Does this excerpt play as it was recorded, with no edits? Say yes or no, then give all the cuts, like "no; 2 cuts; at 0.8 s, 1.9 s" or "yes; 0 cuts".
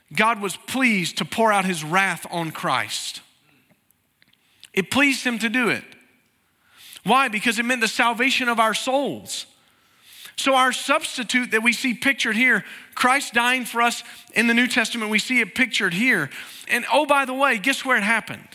no; 1 cut; at 16.7 s